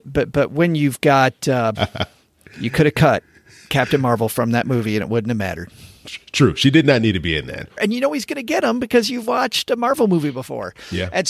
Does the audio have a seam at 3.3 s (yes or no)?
no